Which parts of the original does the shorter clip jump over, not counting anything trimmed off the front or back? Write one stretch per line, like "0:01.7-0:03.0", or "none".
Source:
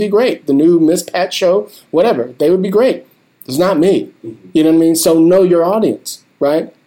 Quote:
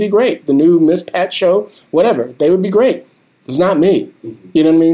none